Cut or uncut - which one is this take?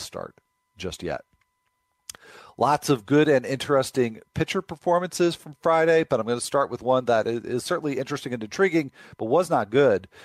uncut